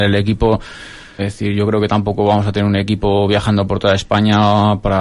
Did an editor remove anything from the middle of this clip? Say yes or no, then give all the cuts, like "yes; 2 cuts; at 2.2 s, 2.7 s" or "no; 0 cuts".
yes; 1 cut; at 1.2 s